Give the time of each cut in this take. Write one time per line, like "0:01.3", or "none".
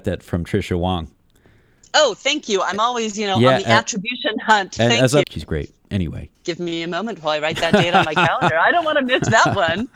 0:05.2
0:06.3